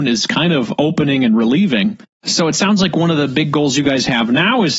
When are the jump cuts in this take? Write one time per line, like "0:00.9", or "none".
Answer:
none